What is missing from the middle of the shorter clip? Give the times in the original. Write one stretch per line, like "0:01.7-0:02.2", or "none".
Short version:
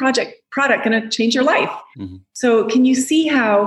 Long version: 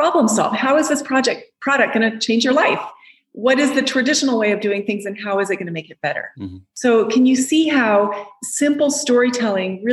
0:03.0-0:06.3